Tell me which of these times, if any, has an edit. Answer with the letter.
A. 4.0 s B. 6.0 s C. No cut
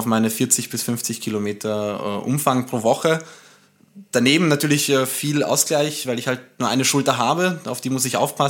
C